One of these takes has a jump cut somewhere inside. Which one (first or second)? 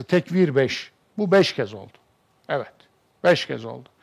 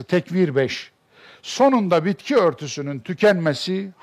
first